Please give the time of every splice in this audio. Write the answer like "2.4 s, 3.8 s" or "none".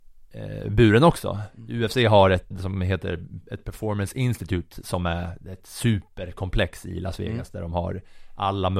2.5 s